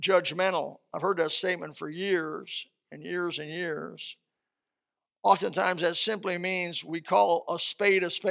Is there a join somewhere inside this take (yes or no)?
no